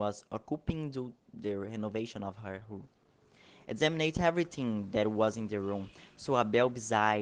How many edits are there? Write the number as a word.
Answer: zero